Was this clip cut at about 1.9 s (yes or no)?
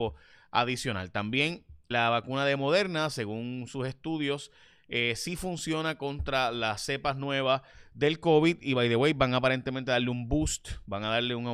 yes